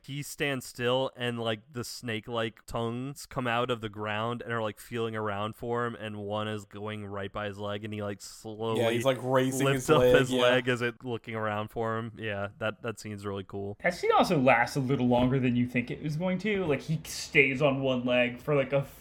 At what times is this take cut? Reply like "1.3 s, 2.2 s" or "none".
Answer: none